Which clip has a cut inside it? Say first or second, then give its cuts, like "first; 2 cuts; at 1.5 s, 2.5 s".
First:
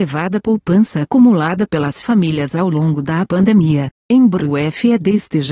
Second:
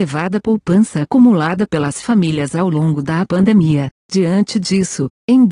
first; 1 cut; at 4.0 s